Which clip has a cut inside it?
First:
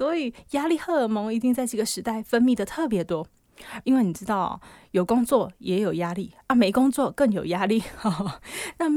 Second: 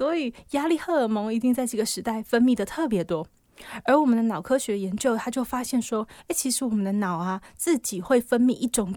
first; 1 cut; at 3.8 s

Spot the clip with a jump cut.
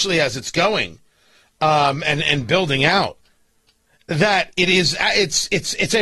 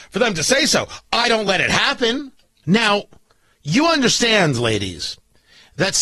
second; 1 cut; at 2.5 s

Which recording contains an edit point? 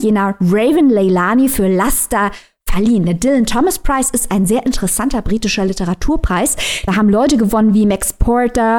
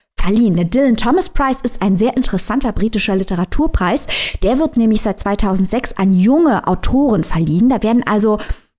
first; 1 cut; at 6.9 s

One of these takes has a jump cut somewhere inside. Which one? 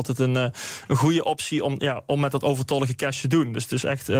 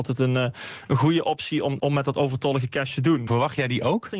second; 2 cuts; at 1.8 s, 3.3 s

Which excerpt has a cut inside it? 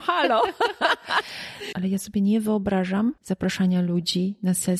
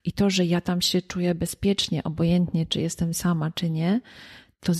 first; 2 cuts; at 1.7 s, 3.2 s

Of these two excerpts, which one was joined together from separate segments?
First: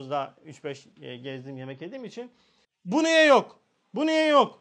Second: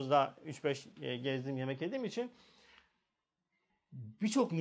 first; 1 cut; at 2.6 s

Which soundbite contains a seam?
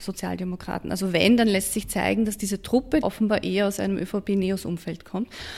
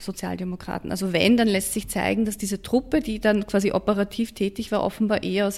first; 1 cut; at 3.0 s

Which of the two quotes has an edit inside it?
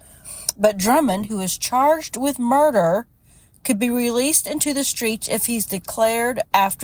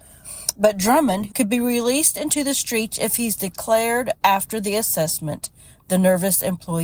second; 1 cut; at 1.3 s

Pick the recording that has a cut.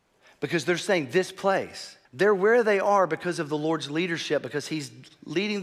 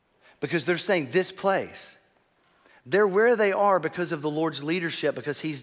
first; 1 cut; at 2.0 s

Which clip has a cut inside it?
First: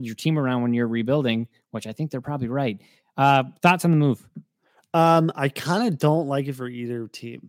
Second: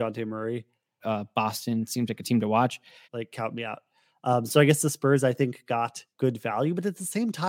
second; 3 cuts; at 1.0 s, 3.0 s, 6.1 s

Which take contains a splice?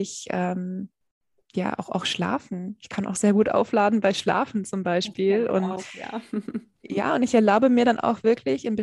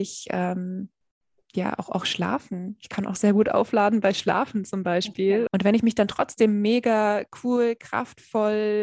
second; 1 cut; at 5.5 s

